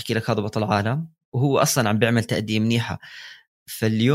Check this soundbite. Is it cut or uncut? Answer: uncut